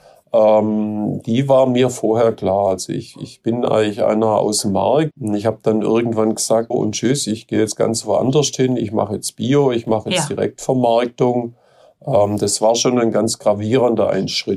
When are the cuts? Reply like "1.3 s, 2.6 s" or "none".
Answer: 5.1 s, 6.7 s